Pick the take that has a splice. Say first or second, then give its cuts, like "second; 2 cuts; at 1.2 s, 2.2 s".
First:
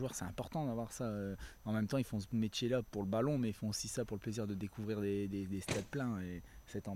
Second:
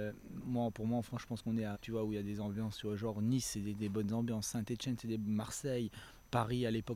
second; 1 cut; at 1.7 s